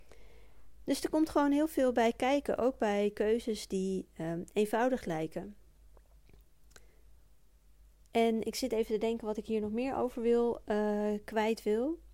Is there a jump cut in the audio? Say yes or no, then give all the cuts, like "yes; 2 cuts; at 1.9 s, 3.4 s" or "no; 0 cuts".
no; 0 cuts